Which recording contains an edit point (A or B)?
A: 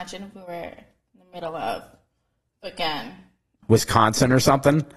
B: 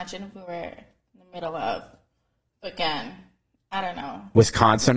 A